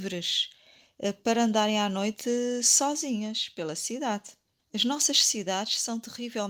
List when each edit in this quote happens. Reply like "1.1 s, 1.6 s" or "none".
4.6 s